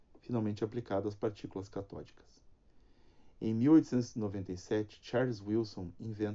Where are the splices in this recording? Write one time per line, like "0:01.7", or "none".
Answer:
none